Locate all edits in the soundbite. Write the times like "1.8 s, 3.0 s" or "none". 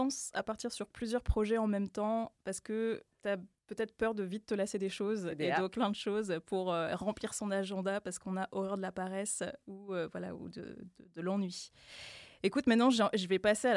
5.7 s